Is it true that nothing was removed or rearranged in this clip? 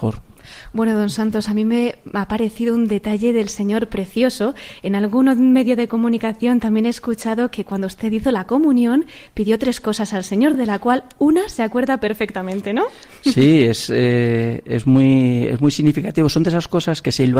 yes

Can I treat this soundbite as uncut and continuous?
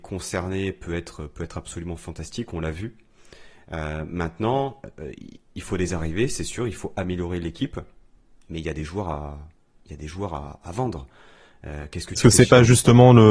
yes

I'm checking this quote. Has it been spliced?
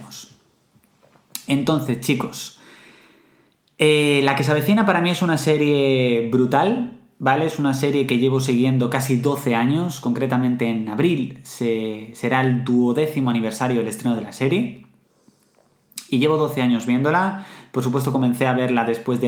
no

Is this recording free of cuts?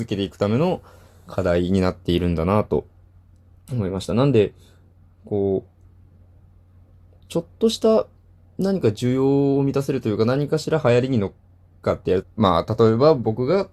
no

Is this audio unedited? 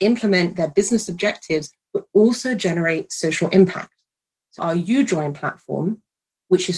no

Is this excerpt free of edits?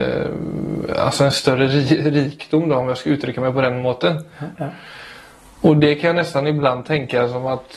no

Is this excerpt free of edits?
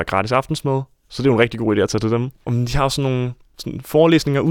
yes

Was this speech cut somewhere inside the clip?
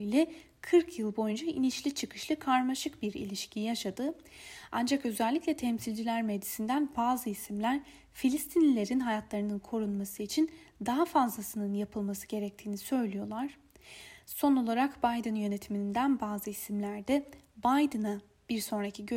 no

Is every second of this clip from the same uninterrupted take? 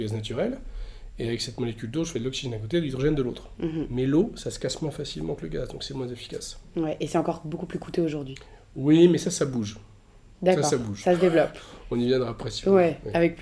yes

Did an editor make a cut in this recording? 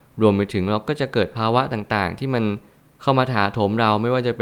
no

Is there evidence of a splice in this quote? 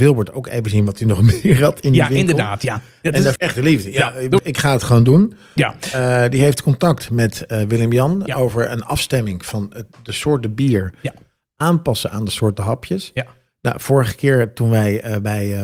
yes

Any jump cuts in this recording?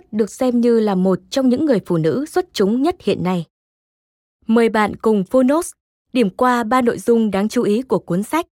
no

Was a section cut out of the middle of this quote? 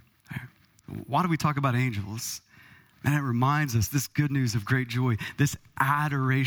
no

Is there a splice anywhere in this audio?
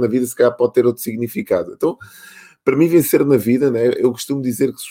no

